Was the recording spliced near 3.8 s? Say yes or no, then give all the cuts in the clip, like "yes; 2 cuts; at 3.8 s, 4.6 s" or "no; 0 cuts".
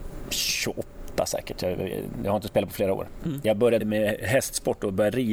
yes; 1 cut; at 3.8 s